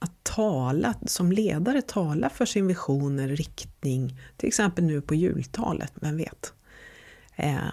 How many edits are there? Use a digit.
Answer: 1